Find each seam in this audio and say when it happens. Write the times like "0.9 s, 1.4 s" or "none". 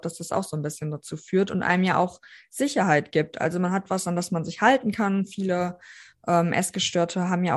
none

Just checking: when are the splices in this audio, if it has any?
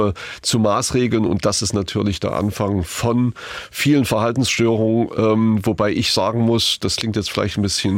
none

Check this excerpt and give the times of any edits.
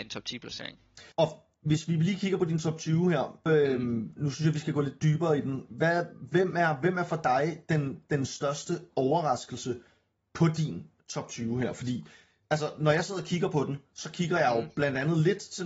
1.1 s, 3.5 s

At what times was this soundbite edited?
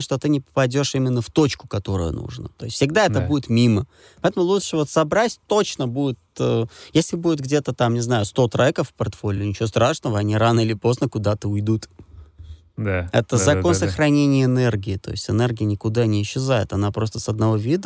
none

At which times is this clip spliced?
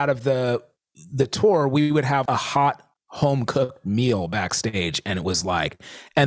2.3 s

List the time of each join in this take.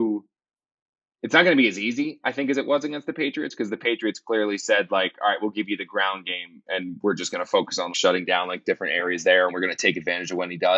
7.9 s, 9.5 s

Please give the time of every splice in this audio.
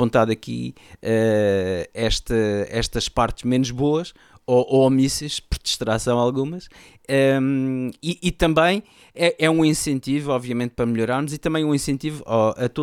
none

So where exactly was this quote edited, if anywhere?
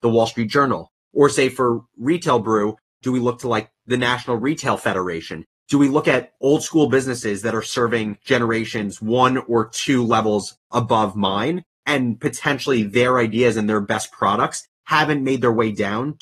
6.4 s

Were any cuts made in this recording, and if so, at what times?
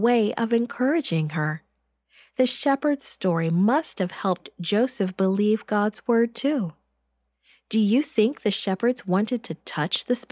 none

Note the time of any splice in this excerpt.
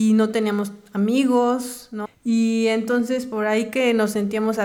2.0 s

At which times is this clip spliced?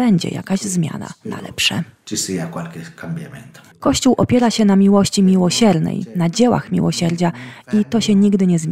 3.7 s

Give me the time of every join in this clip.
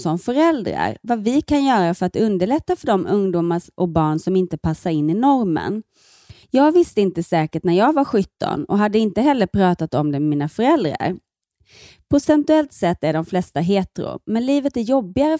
6.4 s

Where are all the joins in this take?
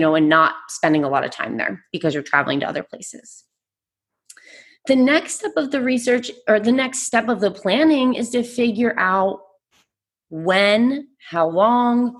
none

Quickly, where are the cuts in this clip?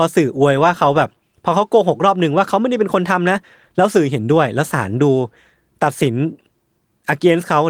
none

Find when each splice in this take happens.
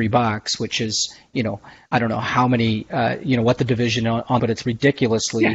4.4 s

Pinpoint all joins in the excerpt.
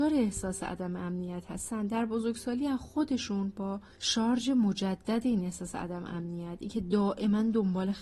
3.9 s

